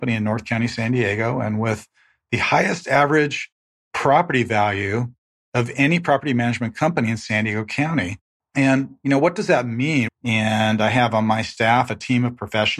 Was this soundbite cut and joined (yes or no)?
yes